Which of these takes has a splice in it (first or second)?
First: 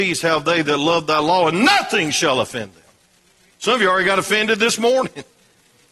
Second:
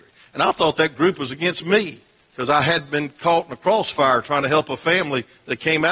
first